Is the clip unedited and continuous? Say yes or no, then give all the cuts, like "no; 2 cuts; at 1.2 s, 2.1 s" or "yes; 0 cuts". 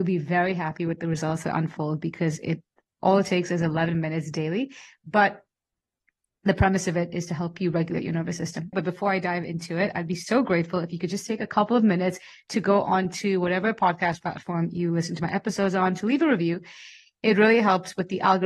no; 1 cut; at 8.7 s